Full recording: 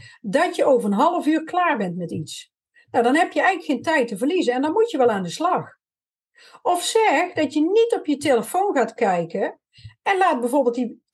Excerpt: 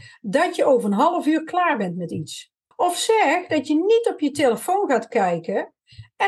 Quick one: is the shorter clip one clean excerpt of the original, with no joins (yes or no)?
no